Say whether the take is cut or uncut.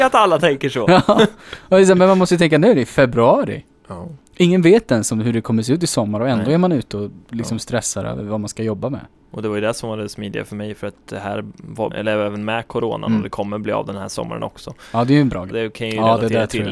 cut